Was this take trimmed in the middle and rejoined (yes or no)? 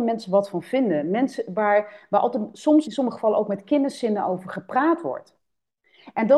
yes